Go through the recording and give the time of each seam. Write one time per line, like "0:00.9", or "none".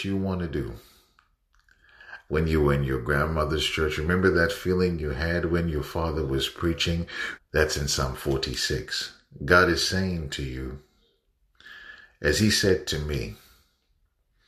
0:02.3
0:07.4